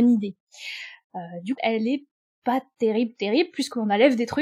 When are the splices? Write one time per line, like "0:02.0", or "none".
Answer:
0:01.6

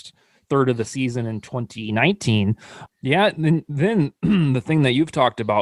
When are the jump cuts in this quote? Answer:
0:02.9

